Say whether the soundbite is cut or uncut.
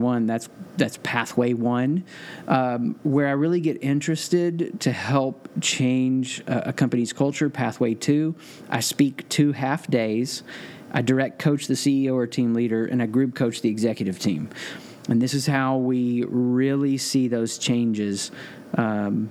uncut